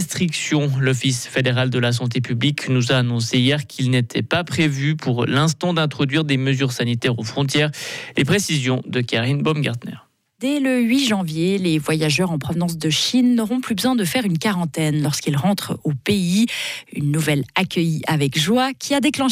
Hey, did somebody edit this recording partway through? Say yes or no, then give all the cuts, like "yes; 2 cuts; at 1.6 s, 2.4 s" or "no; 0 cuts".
no; 0 cuts